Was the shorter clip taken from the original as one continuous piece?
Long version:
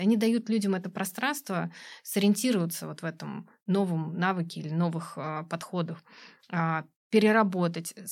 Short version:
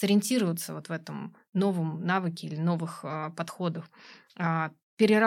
yes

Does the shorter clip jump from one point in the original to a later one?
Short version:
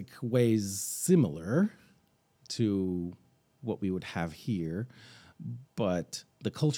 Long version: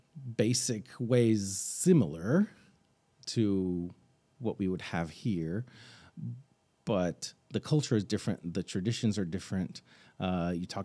yes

